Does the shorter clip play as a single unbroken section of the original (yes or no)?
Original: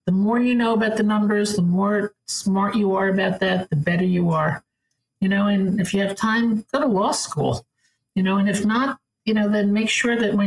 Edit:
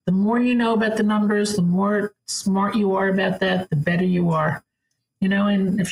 yes